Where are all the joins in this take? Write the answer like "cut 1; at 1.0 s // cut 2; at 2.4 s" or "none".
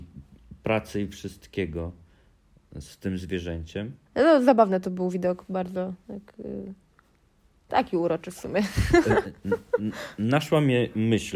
cut 1; at 4.1 s